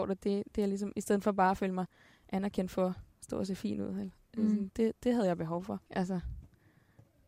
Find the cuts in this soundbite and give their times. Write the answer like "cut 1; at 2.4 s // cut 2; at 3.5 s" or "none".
cut 1; at 4.7 s // cut 2; at 5.9 s